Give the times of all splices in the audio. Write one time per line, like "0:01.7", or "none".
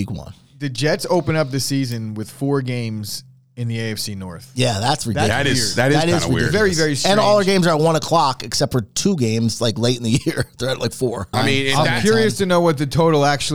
0:11.3